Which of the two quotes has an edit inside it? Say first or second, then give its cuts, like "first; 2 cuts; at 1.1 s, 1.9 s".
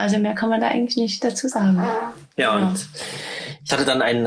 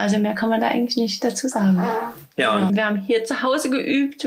second; 1 cut; at 2.7 s